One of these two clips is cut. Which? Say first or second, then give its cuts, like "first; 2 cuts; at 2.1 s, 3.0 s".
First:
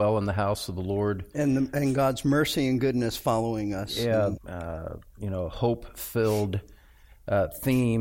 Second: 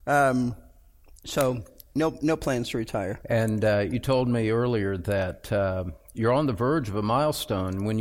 first; 1 cut; at 4.4 s